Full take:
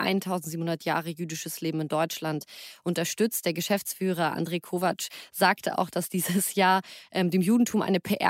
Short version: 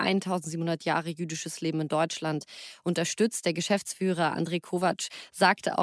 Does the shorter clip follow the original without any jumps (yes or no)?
yes